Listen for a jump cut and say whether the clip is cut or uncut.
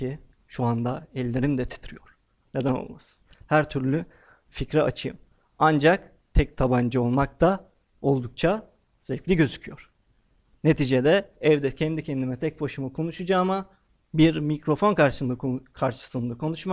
cut